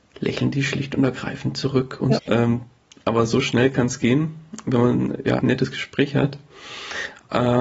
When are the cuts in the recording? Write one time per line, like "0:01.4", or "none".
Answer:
0:02.2
0:05.4